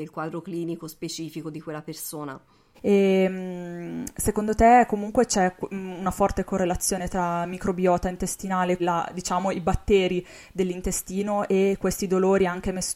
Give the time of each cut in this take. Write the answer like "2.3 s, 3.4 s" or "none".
2.7 s, 8.8 s